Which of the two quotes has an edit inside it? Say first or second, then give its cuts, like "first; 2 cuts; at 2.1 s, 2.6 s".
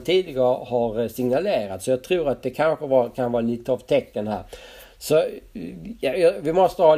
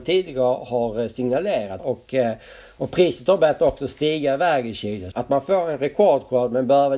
second; 2 cuts; at 1.8 s, 5.1 s